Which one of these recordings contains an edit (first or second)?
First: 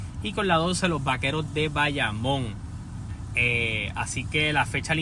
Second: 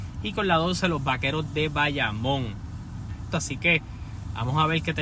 second